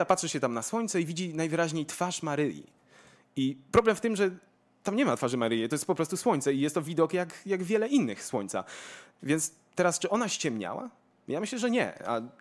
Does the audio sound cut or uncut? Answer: uncut